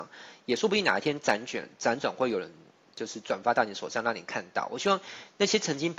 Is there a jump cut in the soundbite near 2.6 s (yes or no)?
no